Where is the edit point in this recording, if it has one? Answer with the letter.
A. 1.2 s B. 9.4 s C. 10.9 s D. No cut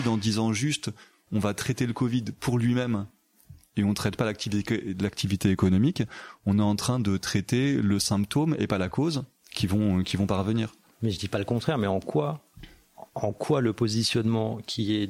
B